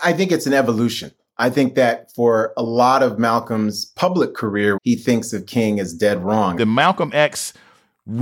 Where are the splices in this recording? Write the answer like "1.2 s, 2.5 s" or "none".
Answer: 4.8 s, 6.6 s